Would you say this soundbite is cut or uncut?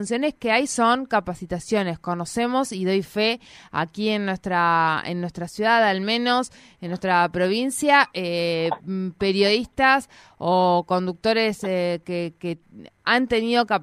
uncut